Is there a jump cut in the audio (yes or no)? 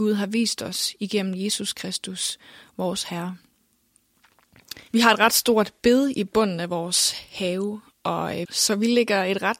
yes